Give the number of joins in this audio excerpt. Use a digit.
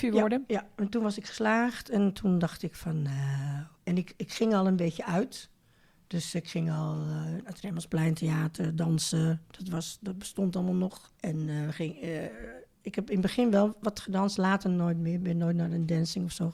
2